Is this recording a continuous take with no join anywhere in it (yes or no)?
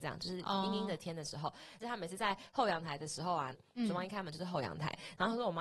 no